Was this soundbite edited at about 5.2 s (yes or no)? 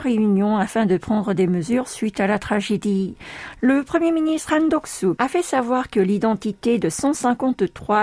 yes